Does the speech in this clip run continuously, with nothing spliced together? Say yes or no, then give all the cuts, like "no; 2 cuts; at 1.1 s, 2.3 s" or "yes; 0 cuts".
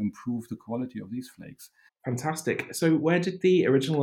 no; 1 cut; at 1.9 s